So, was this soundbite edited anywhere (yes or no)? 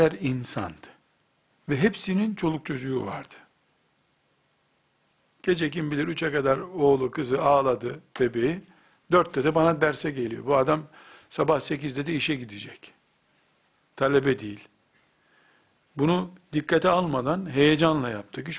no